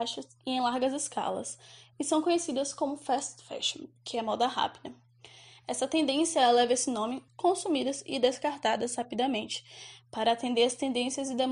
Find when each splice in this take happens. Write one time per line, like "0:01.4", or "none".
0:07.3